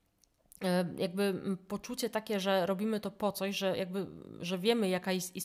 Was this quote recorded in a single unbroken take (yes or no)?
yes